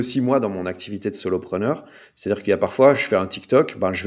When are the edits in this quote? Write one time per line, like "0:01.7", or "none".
none